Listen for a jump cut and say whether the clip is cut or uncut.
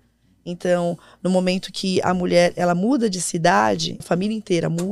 cut